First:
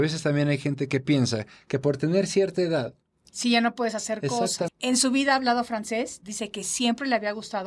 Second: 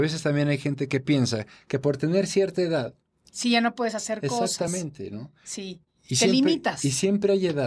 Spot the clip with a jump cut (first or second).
first